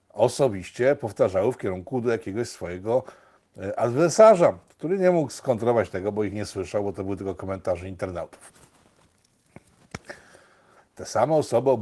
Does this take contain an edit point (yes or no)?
yes